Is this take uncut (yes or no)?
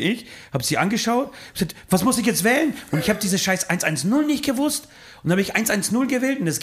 yes